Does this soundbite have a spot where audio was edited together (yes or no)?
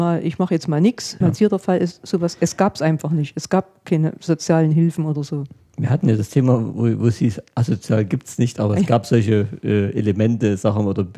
yes